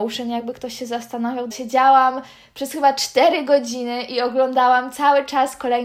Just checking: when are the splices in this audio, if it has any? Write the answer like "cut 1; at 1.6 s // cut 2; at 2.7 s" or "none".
cut 1; at 1.5 s